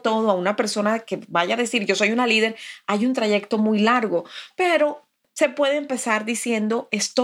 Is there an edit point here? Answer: no; 0 cuts

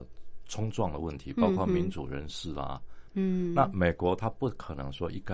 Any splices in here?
yes; 1 cut; at 3.1 s

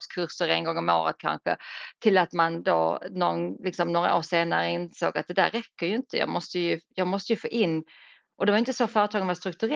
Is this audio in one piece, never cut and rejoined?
yes; 0 cuts

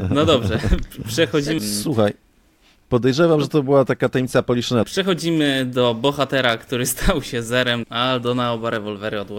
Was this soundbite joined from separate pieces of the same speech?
yes; 3 cuts; at 1.6 s, 4.8 s, 7.8 s

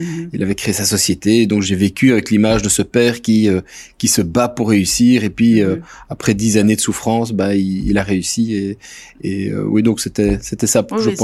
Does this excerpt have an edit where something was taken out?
yes; 1 cut; at 1.6 s

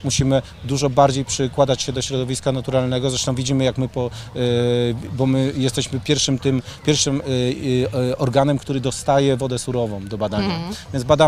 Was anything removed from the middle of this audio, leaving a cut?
no; 0 cuts

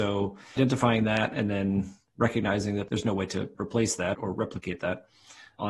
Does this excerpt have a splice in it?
yes; 1 cut; at 4.1 s

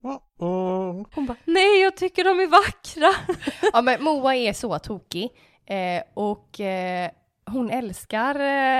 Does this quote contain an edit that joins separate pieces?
no; 0 cuts

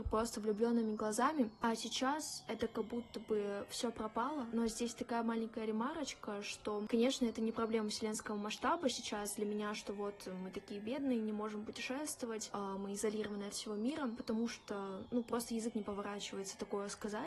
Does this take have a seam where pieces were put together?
no; 0 cuts

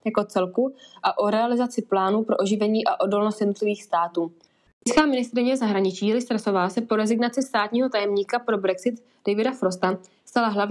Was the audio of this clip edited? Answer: yes; 1 cut; at 4.7 s

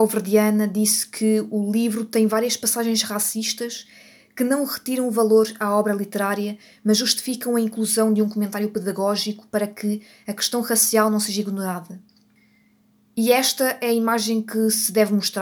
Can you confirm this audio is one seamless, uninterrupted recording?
yes; 0 cuts

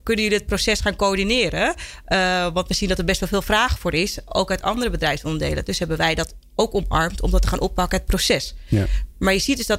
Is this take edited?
no; 0 cuts

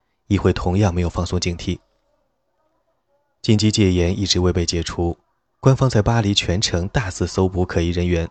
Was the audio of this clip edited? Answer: no; 0 cuts

